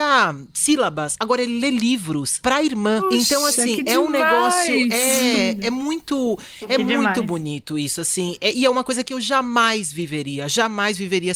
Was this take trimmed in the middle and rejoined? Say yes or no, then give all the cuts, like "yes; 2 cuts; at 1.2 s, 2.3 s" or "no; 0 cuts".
no; 0 cuts